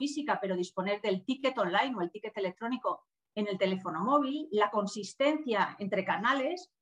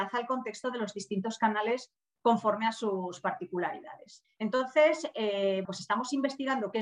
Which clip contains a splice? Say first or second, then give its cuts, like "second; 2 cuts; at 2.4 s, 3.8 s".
second; 2 cuts; at 4.2 s, 5.6 s